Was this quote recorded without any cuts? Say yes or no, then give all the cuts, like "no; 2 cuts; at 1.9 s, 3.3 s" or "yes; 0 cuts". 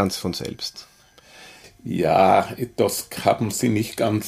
yes; 0 cuts